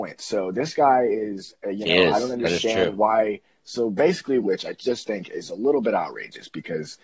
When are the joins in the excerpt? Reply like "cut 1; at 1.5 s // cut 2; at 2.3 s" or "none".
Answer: cut 1; at 4.4 s